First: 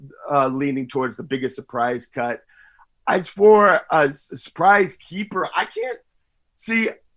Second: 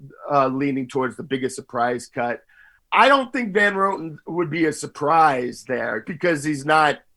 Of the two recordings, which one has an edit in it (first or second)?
second